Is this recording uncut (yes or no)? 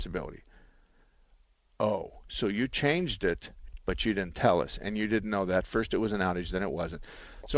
no